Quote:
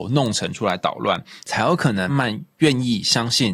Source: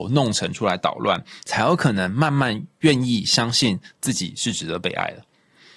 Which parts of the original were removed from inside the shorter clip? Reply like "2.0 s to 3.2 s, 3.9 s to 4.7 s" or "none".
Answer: 2.1 s to 2.3 s

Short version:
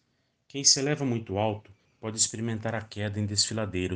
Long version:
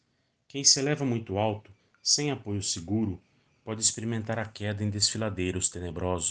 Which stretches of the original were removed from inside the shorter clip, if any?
1.9 s to 3.5 s

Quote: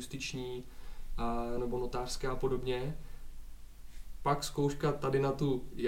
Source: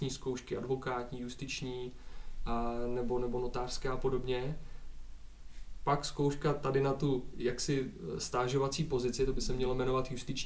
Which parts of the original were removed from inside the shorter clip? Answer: 2.9 s to 3.2 s

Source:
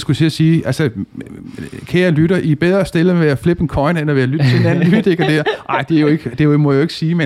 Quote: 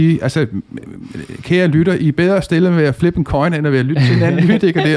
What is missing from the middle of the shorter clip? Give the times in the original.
none

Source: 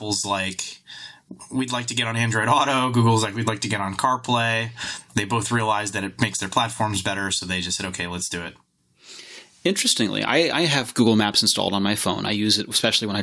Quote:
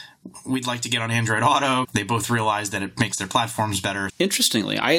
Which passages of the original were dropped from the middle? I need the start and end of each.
2.9 s to 5.0 s, 7.3 s to 9.5 s

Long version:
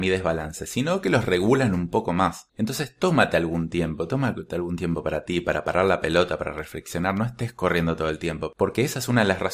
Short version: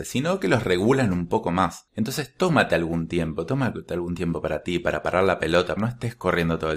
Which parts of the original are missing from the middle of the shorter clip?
6.4 s to 7.1 s

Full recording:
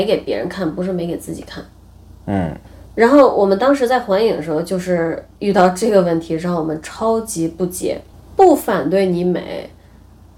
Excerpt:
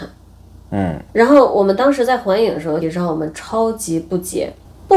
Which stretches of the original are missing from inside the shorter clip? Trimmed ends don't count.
2.6 s to 2.9 s, 4.6 s to 6.3 s

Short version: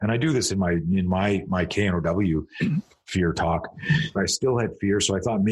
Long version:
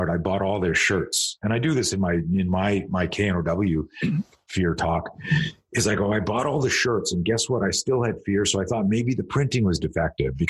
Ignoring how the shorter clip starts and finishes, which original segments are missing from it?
5.6 s to 7.6 s

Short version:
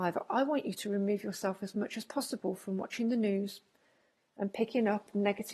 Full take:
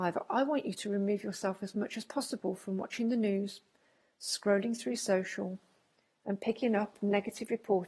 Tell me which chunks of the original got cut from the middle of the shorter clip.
4.2 s to 6.0 s

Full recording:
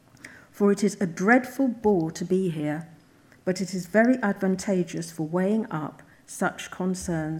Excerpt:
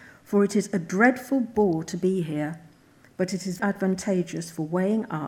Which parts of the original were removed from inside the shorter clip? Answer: 3.9 s to 4.2 s

